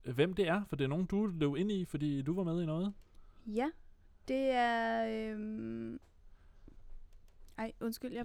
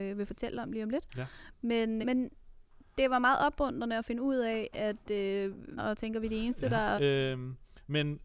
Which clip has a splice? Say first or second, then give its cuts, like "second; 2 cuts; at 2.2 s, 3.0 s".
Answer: second; 3 cuts; at 2.0 s, 5.8 s, 7.0 s